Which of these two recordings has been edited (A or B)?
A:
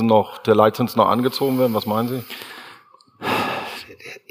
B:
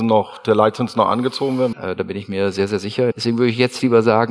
B